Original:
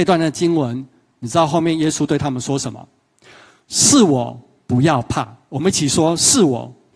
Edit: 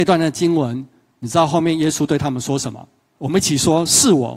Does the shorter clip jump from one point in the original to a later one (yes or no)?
yes